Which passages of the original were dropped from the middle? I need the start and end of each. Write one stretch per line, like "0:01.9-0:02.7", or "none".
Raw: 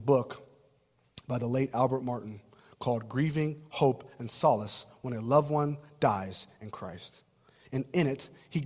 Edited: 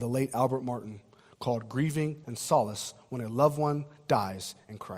0:03.6-0:04.2